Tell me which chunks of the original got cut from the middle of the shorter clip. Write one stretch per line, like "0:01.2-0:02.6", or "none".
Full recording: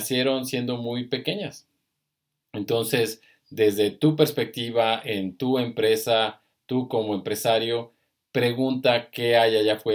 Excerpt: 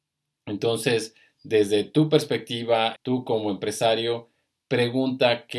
0:05.0-0:06.6